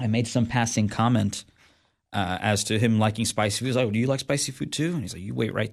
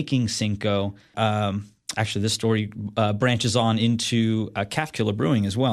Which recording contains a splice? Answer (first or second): second